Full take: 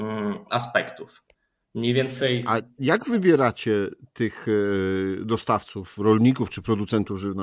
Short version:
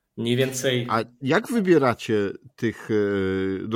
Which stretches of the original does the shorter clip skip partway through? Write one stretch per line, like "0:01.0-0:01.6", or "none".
none